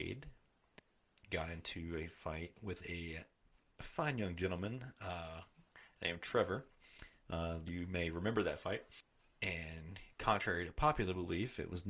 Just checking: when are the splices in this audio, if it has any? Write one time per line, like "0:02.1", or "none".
0:07.7